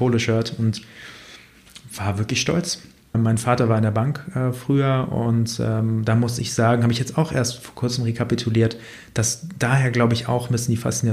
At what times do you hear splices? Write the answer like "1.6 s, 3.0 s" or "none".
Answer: 3.1 s